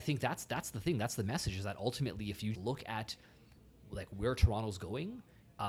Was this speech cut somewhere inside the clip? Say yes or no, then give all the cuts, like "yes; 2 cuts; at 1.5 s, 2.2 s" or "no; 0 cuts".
yes; 1 cut; at 2.5 s